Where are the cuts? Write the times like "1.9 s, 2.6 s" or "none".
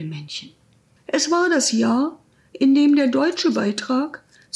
1.0 s